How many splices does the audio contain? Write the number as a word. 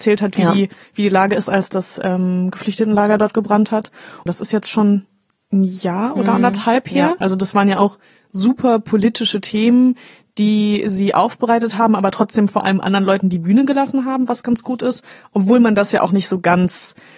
two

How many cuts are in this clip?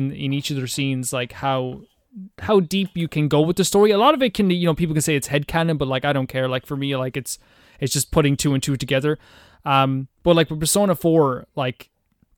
zero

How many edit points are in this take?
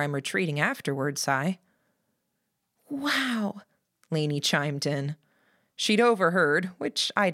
zero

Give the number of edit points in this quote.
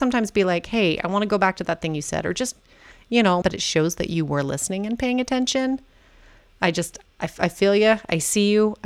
one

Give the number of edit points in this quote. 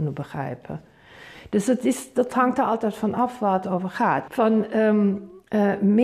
one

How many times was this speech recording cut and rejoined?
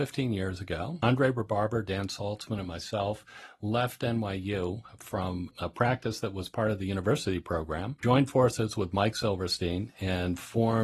zero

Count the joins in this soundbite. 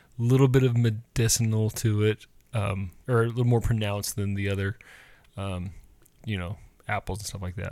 one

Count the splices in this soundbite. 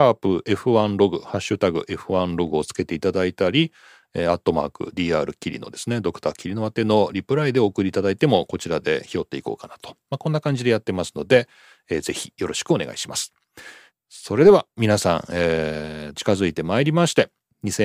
two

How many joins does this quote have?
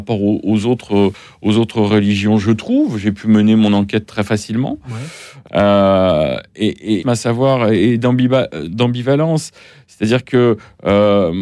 two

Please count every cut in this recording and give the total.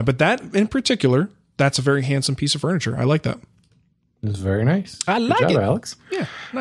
zero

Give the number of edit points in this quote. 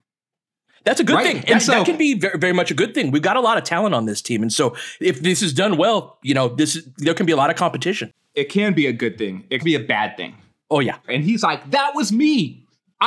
two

